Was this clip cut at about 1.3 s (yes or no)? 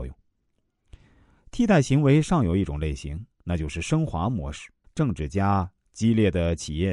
no